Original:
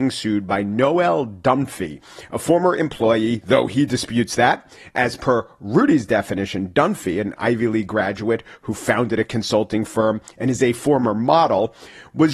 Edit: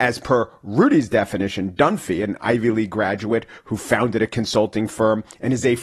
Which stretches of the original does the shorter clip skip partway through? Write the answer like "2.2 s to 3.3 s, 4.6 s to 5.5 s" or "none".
none